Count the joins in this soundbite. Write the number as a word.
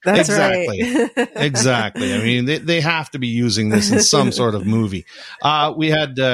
zero